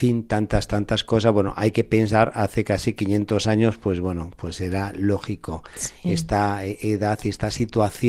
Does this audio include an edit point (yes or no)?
no